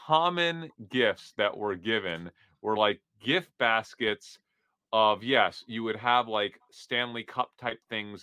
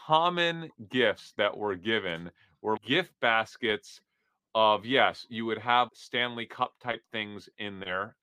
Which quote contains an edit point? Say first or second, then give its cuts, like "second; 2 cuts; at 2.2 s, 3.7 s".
second; 2 cuts; at 2.8 s, 5.9 s